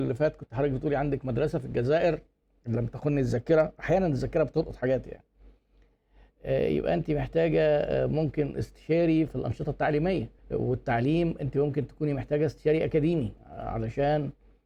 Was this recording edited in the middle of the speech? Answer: yes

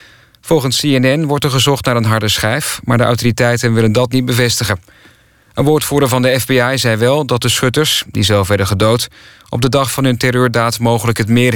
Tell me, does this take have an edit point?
no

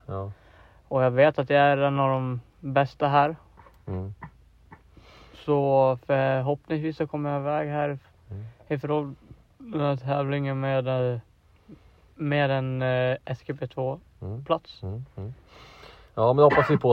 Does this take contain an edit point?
no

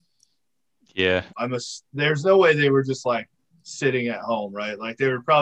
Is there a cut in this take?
yes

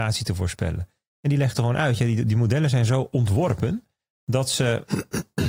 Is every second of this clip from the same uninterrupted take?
yes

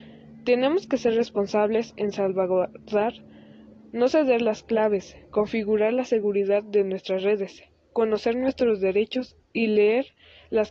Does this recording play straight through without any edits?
yes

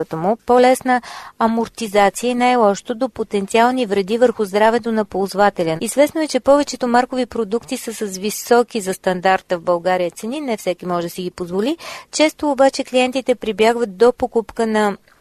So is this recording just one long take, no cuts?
no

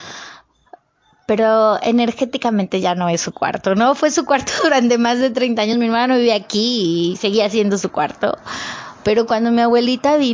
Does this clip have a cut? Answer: no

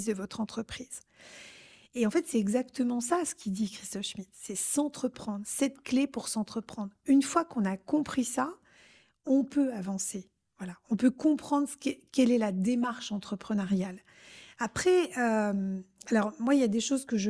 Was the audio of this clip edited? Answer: no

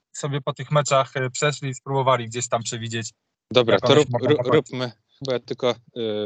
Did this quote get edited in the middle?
yes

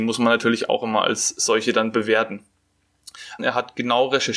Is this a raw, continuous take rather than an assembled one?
no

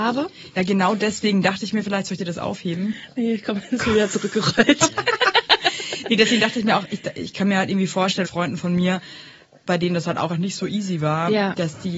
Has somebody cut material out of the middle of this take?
yes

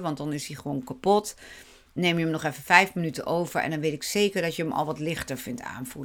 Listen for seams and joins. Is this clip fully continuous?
yes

